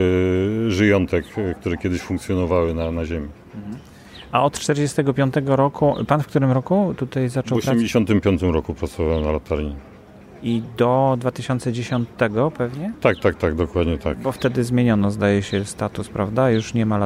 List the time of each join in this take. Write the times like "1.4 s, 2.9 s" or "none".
none